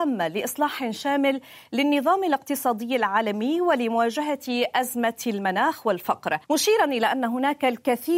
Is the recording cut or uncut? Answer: cut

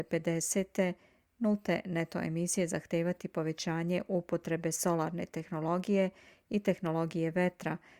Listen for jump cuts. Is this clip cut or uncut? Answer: uncut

